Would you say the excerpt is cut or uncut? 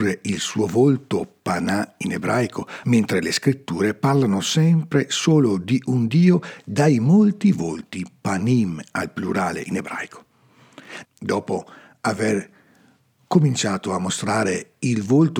cut